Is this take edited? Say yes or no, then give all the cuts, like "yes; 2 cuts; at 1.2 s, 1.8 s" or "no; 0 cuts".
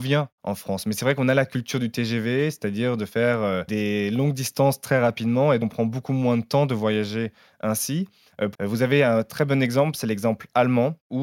yes; 2 cuts; at 5.6 s, 8.5 s